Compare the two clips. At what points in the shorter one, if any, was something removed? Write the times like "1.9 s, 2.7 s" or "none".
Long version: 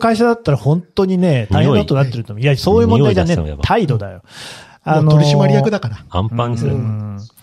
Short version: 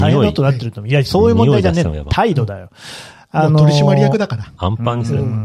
none